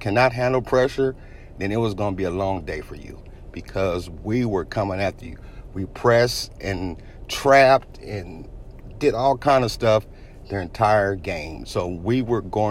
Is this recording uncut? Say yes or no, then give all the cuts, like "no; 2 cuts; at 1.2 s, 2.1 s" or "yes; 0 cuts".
no; 1 cut; at 11.6 s